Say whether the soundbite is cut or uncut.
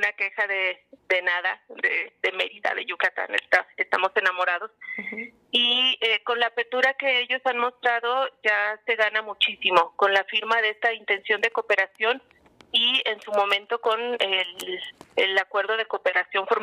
uncut